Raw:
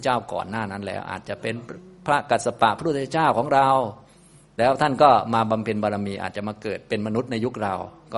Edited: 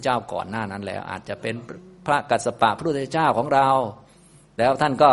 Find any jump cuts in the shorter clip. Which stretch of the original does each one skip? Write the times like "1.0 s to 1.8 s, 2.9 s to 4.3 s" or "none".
none